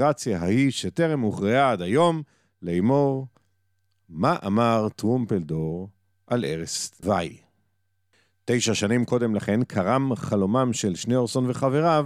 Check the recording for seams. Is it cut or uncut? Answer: uncut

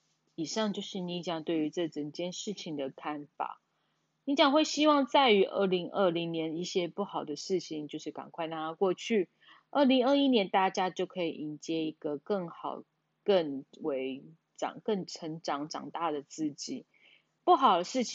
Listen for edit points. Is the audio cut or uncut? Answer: uncut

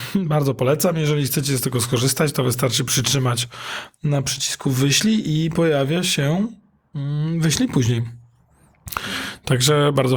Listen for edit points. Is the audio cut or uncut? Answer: uncut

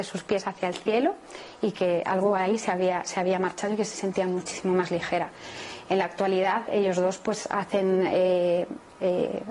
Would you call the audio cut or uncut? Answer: uncut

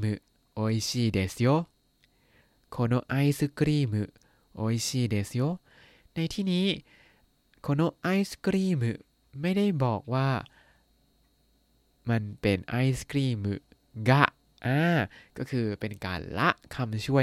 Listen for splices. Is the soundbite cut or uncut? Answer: uncut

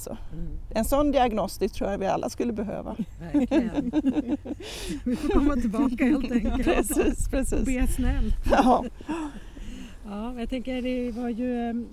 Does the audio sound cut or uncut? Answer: uncut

